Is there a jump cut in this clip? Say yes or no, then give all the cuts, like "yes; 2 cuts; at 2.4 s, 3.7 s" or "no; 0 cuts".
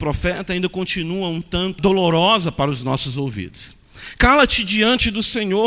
yes; 1 cut; at 1.8 s